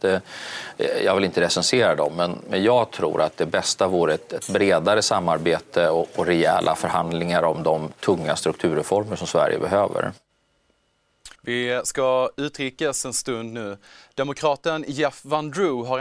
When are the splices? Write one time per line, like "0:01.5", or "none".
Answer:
0:11.3